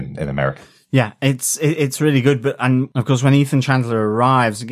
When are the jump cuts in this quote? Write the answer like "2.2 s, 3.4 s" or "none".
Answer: none